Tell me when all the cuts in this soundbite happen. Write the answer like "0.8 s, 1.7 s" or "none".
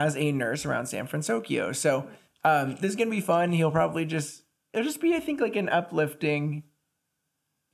none